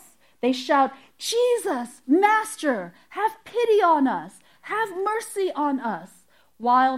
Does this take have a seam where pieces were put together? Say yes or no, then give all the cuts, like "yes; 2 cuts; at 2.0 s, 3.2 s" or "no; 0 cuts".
no; 0 cuts